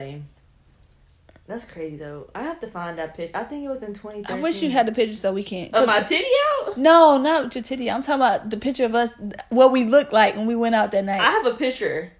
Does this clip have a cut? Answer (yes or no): no